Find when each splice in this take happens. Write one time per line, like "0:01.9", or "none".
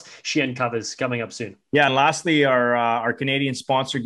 none